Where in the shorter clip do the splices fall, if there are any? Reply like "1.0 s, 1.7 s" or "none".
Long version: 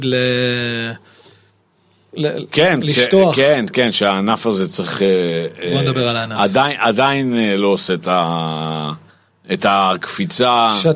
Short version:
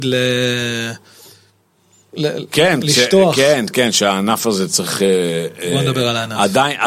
none